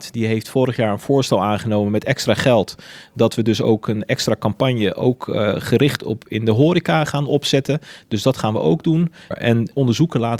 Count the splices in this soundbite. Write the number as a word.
two